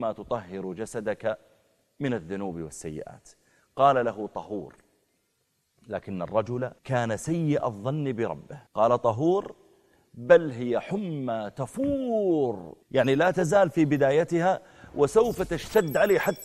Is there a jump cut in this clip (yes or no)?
yes